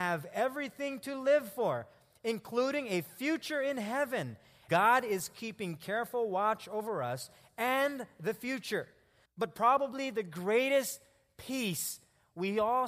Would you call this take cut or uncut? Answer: cut